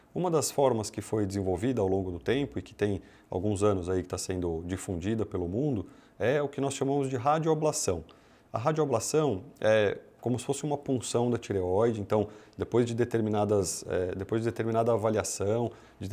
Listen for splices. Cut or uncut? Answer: uncut